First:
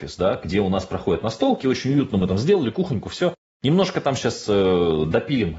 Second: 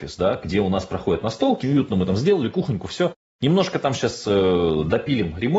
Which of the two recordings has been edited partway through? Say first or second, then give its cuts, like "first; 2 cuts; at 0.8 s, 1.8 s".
second; 1 cut; at 1.6 s